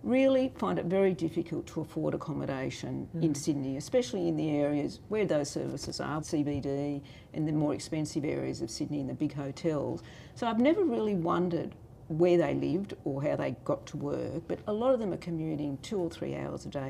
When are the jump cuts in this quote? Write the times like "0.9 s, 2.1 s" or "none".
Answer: 6.2 s